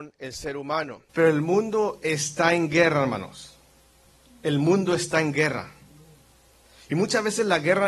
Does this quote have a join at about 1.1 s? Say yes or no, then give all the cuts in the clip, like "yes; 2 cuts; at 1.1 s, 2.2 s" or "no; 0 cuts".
yes; 1 cut; at 1.1 s